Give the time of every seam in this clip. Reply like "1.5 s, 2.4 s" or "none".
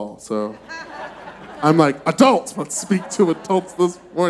2.5 s